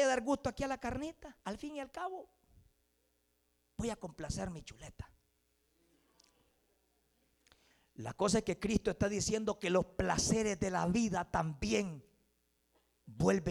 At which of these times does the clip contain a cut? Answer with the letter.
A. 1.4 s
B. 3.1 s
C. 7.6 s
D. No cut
A